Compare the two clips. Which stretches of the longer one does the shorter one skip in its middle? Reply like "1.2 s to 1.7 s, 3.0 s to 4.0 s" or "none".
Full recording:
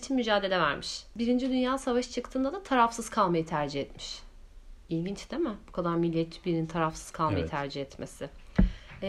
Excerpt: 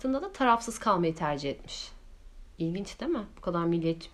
none

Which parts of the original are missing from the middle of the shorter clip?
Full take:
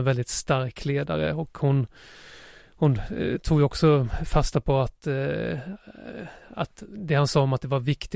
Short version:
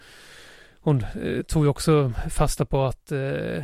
none

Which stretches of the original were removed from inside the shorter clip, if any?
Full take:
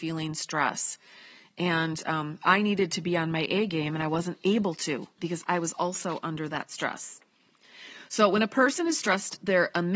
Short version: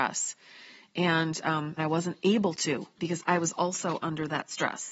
2.4 s to 4.0 s

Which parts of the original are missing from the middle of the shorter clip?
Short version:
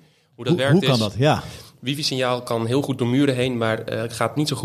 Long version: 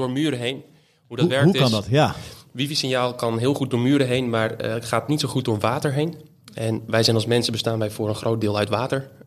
none

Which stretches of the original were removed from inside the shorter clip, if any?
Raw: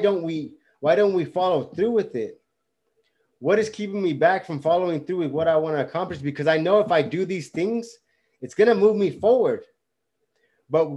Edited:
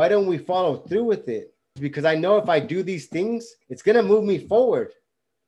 2.6 s to 6.2 s, 8.0 s to 8.3 s

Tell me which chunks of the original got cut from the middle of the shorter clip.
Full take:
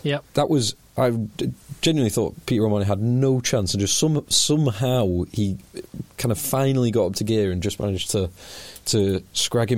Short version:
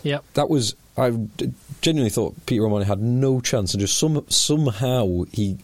none

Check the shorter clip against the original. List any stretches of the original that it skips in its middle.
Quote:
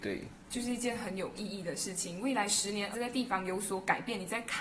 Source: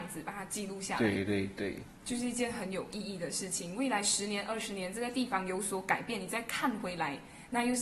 4.5 s to 4.9 s

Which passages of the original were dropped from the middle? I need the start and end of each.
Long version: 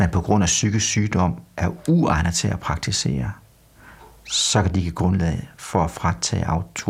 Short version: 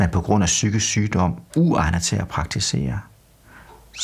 1.5 s to 1.8 s

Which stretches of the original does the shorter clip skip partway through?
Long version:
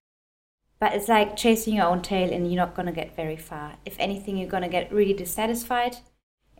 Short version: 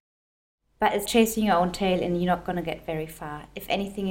1.1 s to 1.4 s

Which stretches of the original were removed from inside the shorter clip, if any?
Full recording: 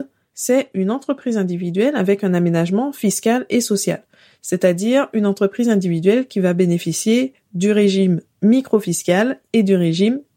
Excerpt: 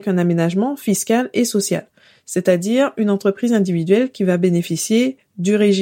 none

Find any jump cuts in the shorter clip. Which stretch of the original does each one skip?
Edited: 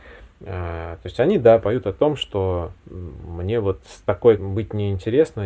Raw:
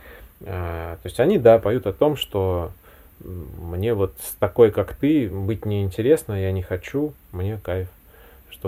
2.8 s to 3.1 s, 4.7 s to 5.3 s

